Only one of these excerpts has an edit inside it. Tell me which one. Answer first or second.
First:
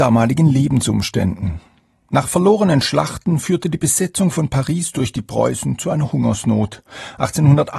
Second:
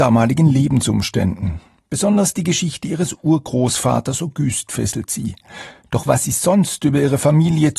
second